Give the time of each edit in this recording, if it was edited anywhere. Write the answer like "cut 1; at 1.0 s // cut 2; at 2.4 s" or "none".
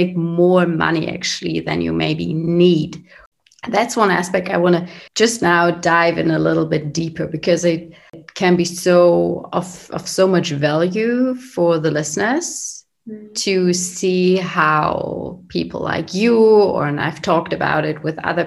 cut 1; at 5.1 s